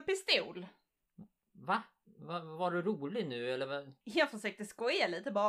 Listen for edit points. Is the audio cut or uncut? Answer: uncut